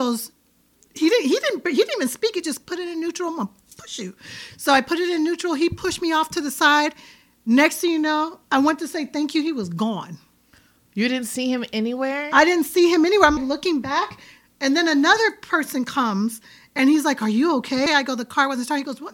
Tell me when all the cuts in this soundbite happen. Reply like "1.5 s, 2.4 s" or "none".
13.4 s, 17.9 s